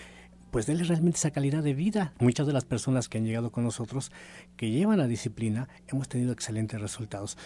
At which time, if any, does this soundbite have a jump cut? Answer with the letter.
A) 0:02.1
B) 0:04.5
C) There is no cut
A